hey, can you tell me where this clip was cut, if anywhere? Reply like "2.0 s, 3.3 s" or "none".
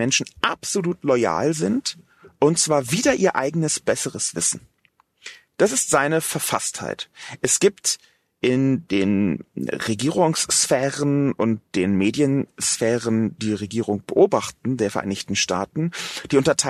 13.4 s